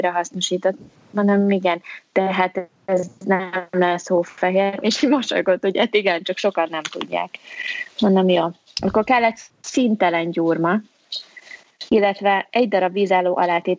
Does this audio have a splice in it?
yes; 2 cuts; at 4.8 s, 11.9 s

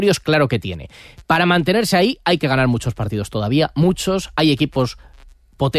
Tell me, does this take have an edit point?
no; 0 cuts

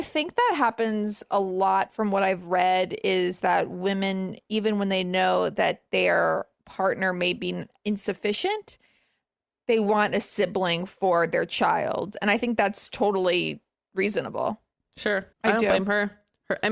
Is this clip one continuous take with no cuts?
no; 1 cut; at 15.3 s

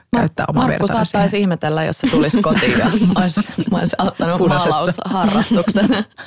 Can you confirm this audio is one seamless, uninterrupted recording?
yes; 0 cuts

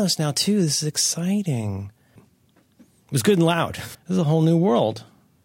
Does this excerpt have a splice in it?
yes; 2 cuts; at 2.2 s, 3.9 s

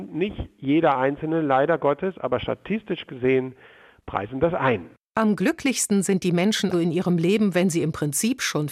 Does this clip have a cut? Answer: yes; 1 cut; at 6.7 s

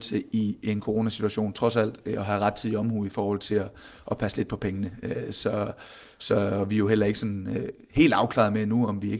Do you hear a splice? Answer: no; 0 cuts

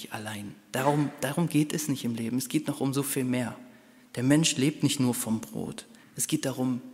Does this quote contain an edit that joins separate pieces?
yes; 1 cut; at 6.0 s

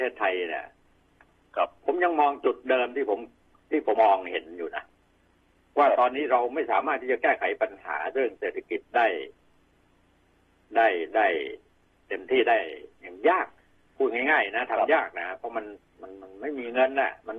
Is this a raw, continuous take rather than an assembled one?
no; 1 cut; at 4.0 s

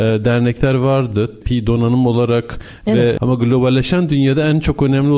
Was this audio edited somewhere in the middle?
yes; 1 cut; at 3.2 s

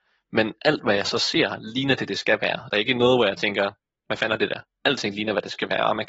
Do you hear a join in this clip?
no; 0 cuts

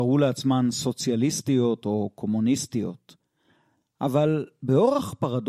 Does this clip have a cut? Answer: no; 0 cuts

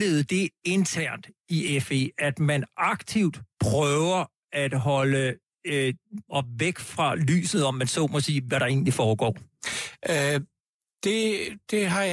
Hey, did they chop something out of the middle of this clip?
yes; 2 cuts; at 6.3 s, 8.5 s

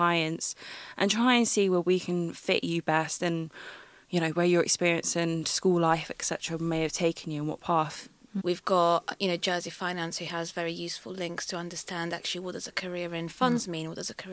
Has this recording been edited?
yes; 1 cut; at 8.4 s

